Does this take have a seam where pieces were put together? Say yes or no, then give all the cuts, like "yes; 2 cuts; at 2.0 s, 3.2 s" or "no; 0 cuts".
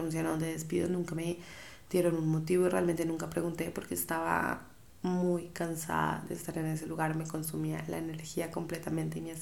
no; 0 cuts